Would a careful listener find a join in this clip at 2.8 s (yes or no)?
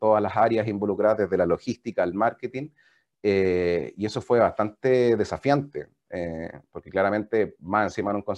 no